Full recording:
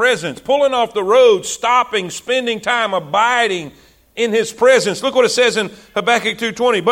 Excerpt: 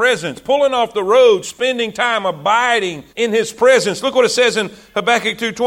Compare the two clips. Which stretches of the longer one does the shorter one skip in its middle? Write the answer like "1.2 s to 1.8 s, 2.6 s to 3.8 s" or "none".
1.4 s to 2.1 s, 3.8 s to 4.1 s

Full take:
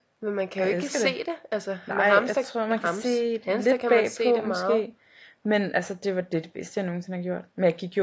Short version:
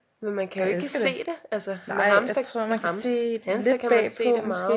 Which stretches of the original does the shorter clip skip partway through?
none

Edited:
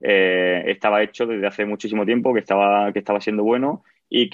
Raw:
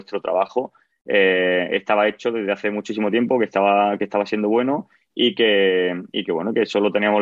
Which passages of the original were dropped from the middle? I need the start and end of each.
none

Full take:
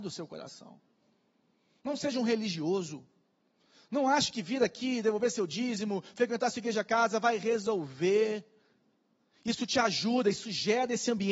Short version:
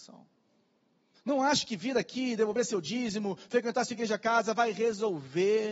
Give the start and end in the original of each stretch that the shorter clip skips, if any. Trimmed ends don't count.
1.7 s to 3.8 s

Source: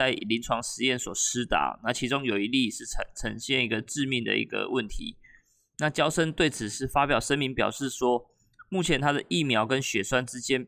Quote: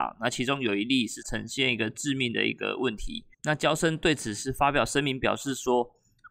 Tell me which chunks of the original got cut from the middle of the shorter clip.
2.8 s to 3.1 s, 5.2 s to 5.7 s

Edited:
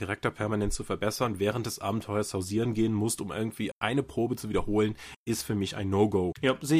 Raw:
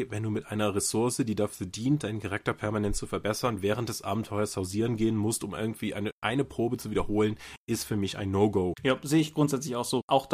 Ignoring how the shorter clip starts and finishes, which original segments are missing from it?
5.9 s to 6.1 s

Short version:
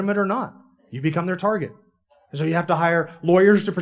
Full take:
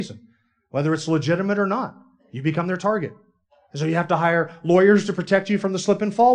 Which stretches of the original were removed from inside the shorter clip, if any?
none

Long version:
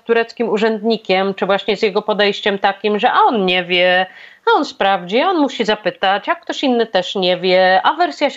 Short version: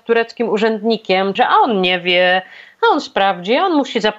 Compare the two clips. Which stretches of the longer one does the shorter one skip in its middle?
1.4 s to 3.0 s

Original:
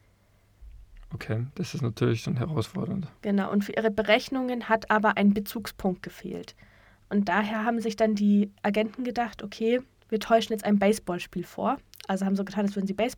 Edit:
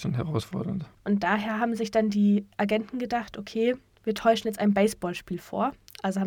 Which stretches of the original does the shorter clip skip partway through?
3.2 s to 7.0 s

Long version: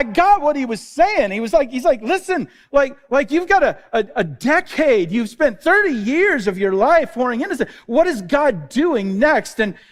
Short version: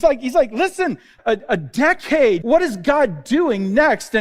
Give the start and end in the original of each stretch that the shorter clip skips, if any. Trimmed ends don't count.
2.7 s to 3.9 s, 5.1 s to 7.9 s

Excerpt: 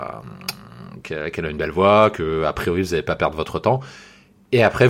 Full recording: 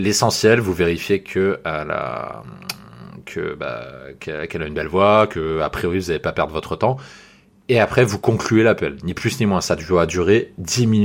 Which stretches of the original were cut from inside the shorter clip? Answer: 3.2 s to 4.2 s

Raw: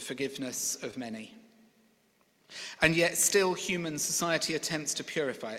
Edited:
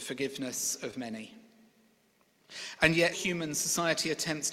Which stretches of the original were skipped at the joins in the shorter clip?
3.1 s to 3.6 s

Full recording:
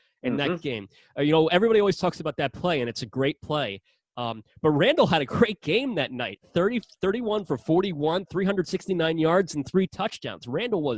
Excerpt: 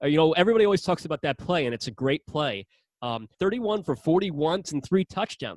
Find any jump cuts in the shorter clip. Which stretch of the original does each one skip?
4.5 s to 7.0 s, 8.3 s to 9.5 s

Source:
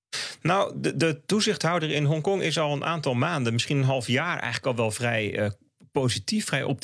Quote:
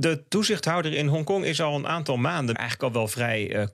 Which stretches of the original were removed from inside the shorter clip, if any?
3.5 s to 4.4 s

